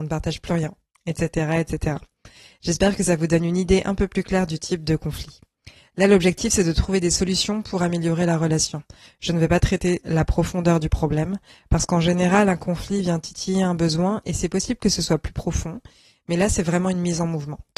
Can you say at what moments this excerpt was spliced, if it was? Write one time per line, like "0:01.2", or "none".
none